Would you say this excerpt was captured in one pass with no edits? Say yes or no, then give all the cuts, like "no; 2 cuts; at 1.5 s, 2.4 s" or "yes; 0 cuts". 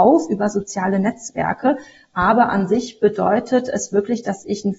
yes; 0 cuts